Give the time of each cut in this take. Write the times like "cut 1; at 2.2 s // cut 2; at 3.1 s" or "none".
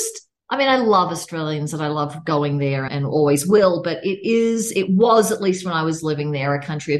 cut 1; at 2.9 s